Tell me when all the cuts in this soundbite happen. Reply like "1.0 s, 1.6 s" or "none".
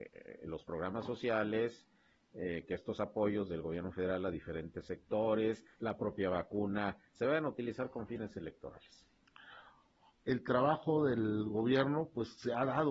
10.2 s

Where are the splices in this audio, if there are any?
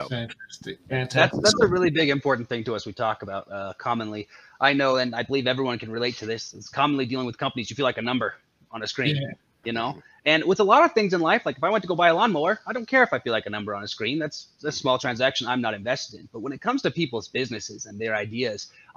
none

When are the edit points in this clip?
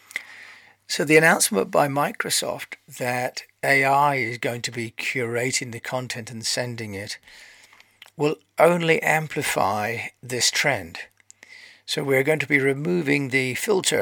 none

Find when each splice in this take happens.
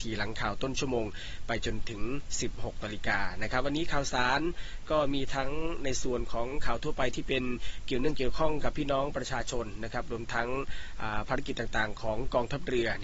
none

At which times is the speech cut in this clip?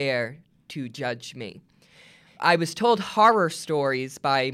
2.3 s

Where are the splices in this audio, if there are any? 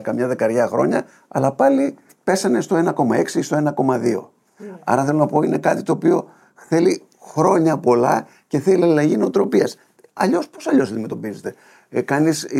none

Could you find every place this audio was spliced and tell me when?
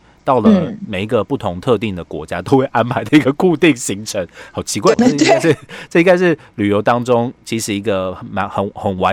4.9 s

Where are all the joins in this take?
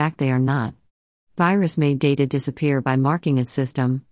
none

